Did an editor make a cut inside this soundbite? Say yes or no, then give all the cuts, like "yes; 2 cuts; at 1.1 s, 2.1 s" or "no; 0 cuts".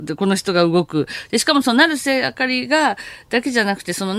no; 0 cuts